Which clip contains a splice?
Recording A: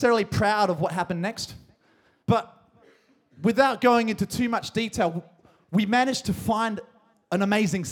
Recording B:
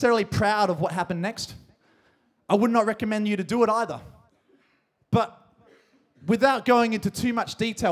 A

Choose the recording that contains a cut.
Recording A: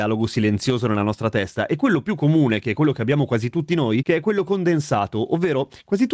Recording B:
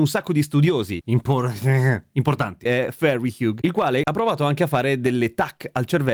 B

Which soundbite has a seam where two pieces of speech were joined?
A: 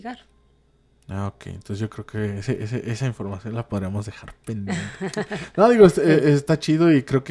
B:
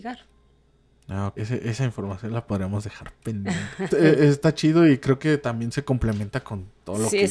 B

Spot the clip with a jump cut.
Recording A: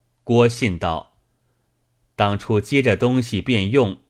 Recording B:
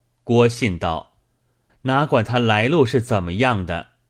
B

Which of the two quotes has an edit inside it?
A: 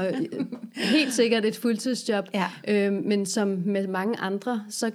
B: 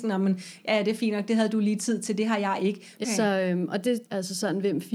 B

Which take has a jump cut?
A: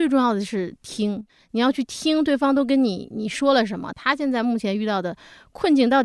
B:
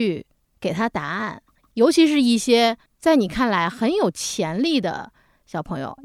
A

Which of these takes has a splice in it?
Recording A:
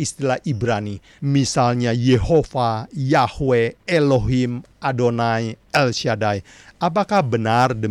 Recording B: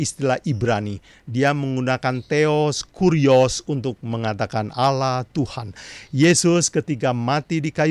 A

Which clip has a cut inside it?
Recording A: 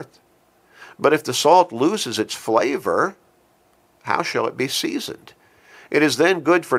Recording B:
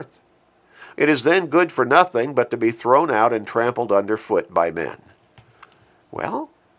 B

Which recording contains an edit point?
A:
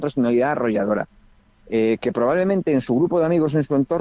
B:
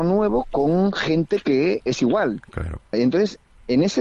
B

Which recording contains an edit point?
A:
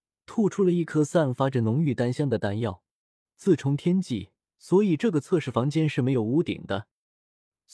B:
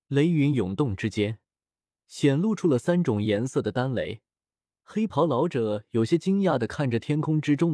A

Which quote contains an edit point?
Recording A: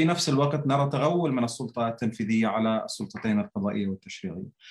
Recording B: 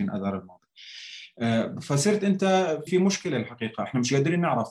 B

